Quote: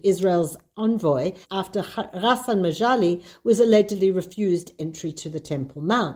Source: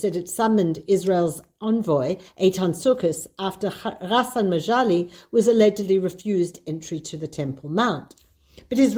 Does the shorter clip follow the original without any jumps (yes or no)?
no